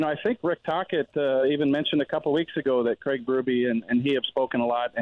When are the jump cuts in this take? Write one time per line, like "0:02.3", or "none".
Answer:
none